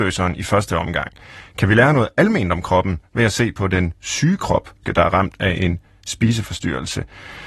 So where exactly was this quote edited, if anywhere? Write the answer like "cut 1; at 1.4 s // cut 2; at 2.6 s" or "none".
cut 1; at 4.8 s